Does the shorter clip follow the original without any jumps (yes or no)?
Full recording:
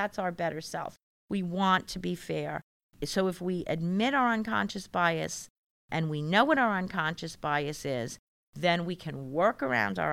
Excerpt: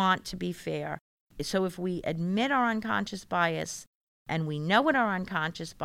yes